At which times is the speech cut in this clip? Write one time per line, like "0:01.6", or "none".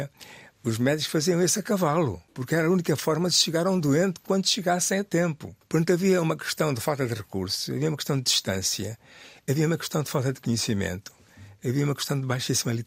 none